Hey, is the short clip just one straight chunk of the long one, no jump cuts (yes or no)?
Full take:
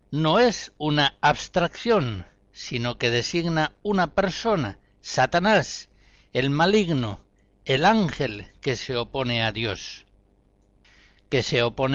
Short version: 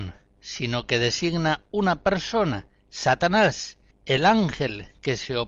no